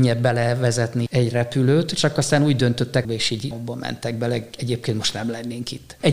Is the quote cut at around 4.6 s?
no; 2 cuts; at 1.1 s, 3.0 s

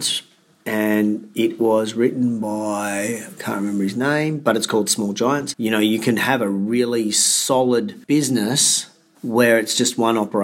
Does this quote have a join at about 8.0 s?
yes; 2 cuts; at 5.5 s, 8.0 s

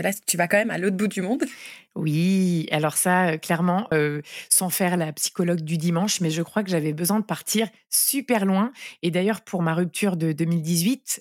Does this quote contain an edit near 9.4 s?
no; 1 cut; at 3.9 s

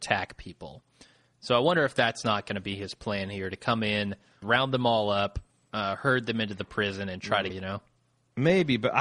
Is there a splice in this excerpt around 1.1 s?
no; 2 cuts; at 4.4 s, 7.5 s

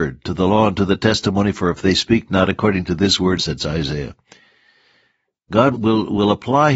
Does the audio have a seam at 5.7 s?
yes; 2 cuts; at 3.4 s, 5.7 s

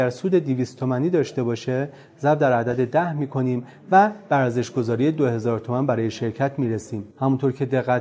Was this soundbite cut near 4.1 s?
no; 1 cut; at 7.1 s

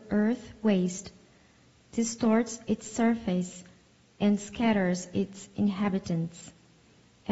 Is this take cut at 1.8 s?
yes; 1 cut; at 1.8 s

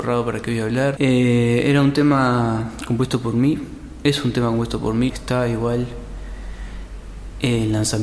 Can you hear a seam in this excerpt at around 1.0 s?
yes; 2 cuts; at 1.0 s, 5.1 s

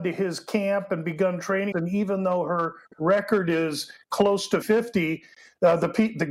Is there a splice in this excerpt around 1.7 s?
yes; 2 cuts; at 1.7 s, 4.6 s

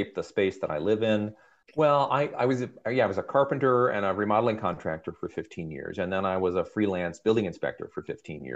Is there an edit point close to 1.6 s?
yes; 1 cut; at 1.6 s

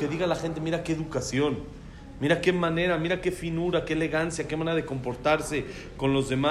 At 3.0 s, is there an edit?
no; 0 cuts

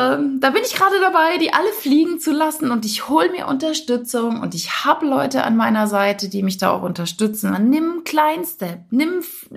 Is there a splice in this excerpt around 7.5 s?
yes; 1 cut; at 7.5 s

